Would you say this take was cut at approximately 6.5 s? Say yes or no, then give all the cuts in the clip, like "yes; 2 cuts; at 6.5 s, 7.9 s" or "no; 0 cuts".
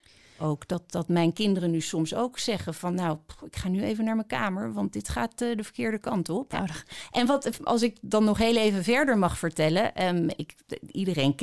yes; 1 cut; at 6.5 s